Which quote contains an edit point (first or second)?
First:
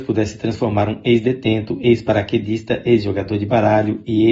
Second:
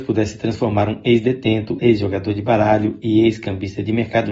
second